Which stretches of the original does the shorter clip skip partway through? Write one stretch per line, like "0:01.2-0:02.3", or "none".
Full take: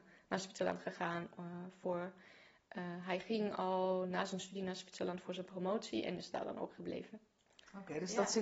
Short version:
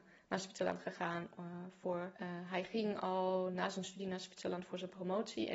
0:02.2-0:02.7